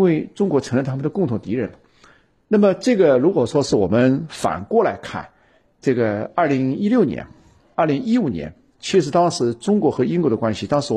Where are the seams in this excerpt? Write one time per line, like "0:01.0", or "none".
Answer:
none